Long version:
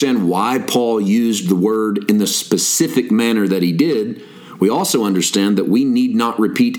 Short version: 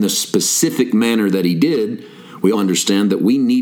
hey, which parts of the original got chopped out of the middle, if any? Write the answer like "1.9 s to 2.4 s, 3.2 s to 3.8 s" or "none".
4.7 s to 5.0 s